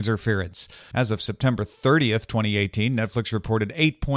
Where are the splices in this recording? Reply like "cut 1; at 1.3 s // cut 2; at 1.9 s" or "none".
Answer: cut 1; at 0.9 s

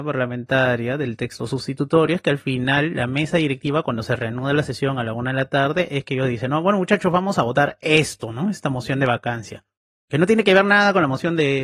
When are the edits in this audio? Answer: none

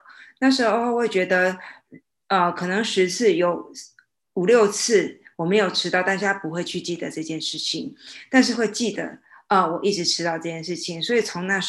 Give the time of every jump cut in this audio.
none

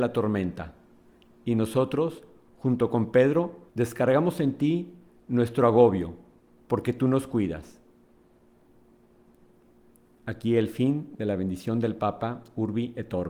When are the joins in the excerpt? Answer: cut 1; at 1.3 s // cut 2; at 3.7 s

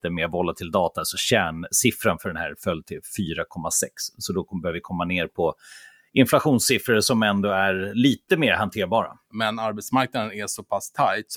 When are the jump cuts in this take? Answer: cut 1; at 9.3 s

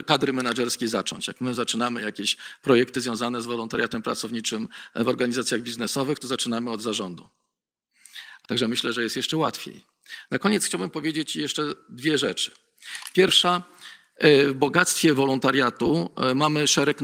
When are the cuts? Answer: cut 1; at 8.4 s // cut 2; at 10.3 s

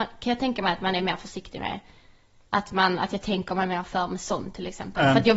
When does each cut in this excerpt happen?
none

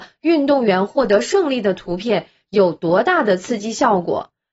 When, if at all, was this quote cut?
none

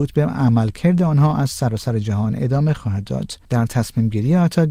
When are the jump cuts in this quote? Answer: cut 1; at 3.4 s

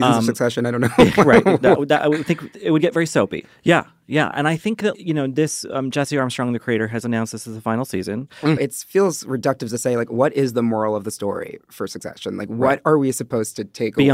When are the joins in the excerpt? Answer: cut 1; at 3.4 s // cut 2; at 4.9 s // cut 3; at 8.6 s

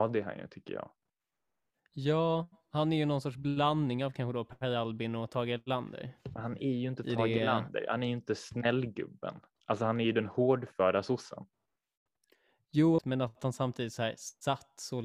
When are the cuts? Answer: cut 1; at 13.0 s

